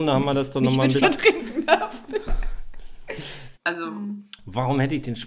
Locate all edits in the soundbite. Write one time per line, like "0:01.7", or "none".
0:01.0
0:03.5